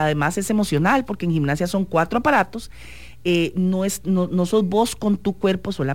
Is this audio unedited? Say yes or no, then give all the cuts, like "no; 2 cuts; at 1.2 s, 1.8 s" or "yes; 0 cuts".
yes; 0 cuts